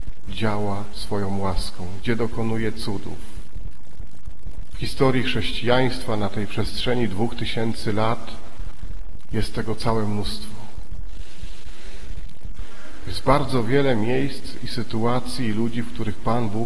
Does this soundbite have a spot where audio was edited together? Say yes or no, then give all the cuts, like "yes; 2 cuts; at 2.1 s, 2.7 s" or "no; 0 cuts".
no; 0 cuts